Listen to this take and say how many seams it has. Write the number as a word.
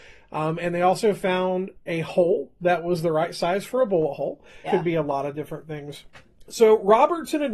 one